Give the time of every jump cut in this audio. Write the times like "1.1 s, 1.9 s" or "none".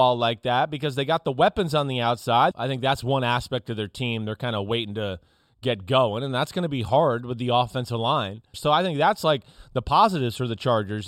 2.5 s, 8.5 s